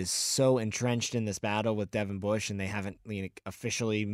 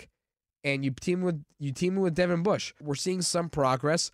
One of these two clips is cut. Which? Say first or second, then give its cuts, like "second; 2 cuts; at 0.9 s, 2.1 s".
second; 1 cut; at 2.8 s